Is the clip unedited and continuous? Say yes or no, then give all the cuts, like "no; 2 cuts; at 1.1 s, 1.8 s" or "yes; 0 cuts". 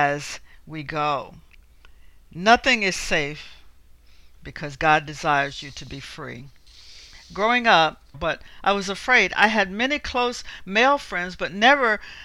no; 1 cut; at 8.1 s